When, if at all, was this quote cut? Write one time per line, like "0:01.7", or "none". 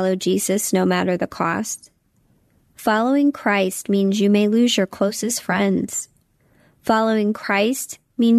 none